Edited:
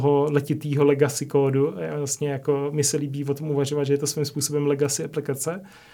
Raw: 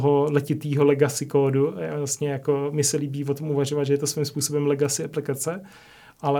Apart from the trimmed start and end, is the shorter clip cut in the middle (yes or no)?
no